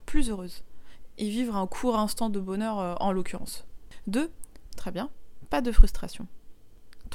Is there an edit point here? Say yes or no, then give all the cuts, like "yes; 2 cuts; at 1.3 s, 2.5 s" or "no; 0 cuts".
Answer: yes; 1 cut; at 4.7 s